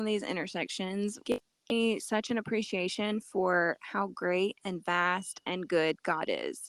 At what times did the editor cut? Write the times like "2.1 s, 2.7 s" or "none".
1.2 s